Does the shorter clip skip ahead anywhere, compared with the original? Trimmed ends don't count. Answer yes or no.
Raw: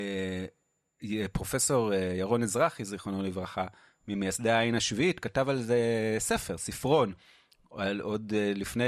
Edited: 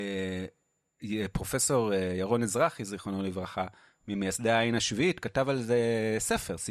no